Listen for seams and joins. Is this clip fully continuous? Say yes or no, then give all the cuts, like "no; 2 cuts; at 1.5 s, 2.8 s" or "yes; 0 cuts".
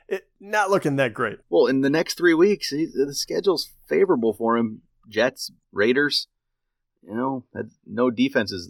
no; 2 cuts; at 1.4 s, 5.6 s